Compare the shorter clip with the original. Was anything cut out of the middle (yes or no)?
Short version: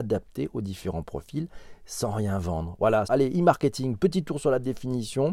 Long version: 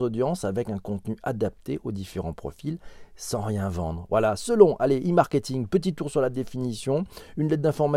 yes